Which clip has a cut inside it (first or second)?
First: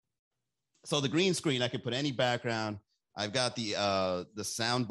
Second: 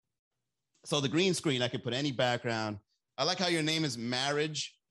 second